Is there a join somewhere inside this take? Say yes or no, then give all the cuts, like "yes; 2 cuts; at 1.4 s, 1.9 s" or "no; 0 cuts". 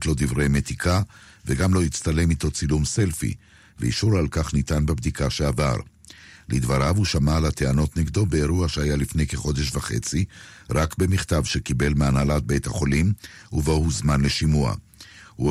no; 0 cuts